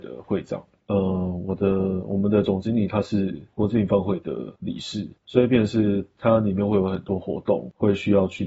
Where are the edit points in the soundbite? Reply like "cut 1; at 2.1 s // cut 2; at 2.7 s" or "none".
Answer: none